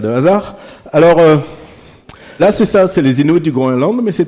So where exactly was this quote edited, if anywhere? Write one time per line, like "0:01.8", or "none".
0:02.4

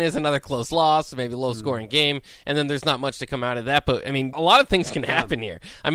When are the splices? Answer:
0:04.3

